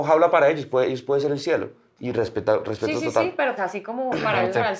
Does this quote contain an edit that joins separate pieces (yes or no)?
yes